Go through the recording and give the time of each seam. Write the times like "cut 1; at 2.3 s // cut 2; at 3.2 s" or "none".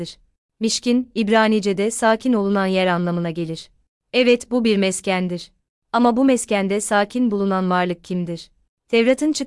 none